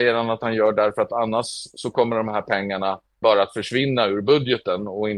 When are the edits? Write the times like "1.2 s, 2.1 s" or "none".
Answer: 3.2 s